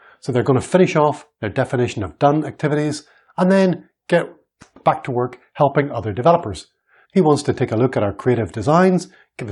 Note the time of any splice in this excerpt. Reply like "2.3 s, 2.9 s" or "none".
7.0 s